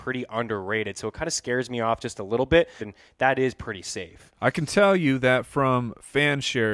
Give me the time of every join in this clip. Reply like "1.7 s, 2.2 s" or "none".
2.8 s

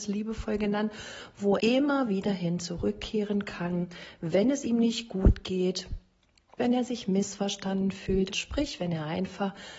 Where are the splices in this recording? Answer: 1.6 s, 6.6 s, 8.3 s

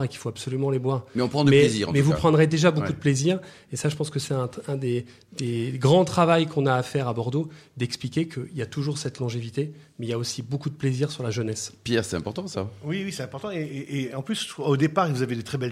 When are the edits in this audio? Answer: none

